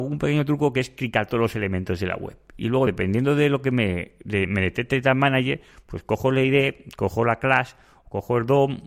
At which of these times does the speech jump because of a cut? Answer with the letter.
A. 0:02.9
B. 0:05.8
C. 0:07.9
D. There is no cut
D